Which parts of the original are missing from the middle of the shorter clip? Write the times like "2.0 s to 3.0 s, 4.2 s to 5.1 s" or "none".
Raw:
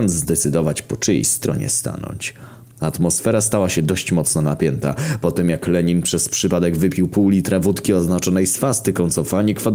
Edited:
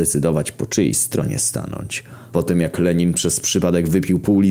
2.6 s to 5.2 s